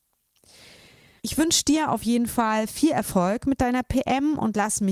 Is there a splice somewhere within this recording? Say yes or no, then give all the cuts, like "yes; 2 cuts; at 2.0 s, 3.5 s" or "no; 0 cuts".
yes; 1 cut; at 1.2 s